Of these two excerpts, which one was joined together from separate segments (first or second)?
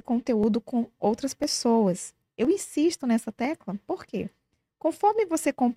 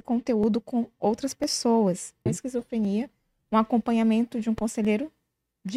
second